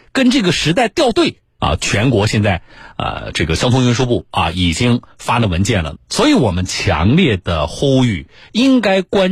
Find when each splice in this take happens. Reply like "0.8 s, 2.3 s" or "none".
1.6 s, 5.9 s

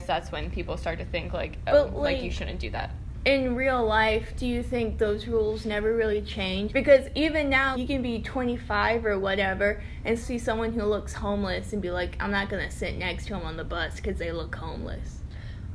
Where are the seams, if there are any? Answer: 6.7 s, 7.7 s, 10.2 s

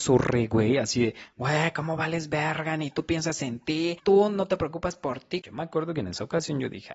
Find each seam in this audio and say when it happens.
5.4 s

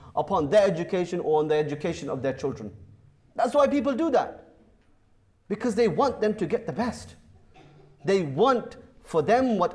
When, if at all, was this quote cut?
none

